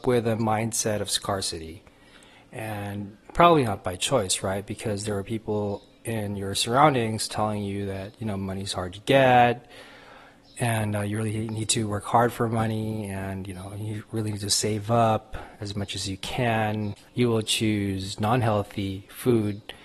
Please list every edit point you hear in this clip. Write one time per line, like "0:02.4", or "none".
0:17.1